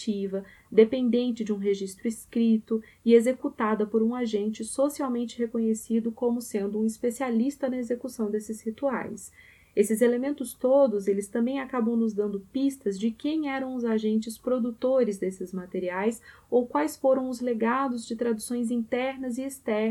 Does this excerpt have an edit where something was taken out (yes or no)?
no